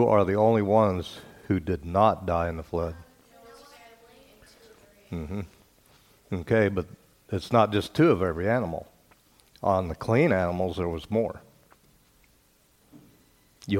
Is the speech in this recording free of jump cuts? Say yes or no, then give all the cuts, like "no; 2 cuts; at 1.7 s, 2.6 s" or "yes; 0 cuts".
yes; 0 cuts